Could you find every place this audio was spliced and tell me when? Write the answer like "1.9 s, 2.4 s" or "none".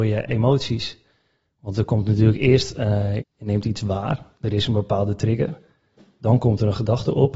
3.2 s